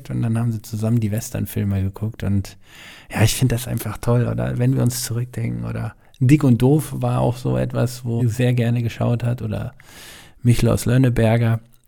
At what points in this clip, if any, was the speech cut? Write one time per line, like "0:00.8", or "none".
0:08.2